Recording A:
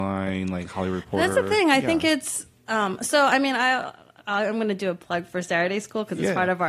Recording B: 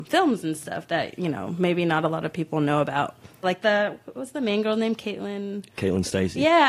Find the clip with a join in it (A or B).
B